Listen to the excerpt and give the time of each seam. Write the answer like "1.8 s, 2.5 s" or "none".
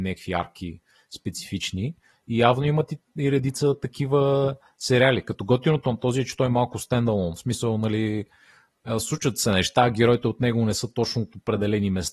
none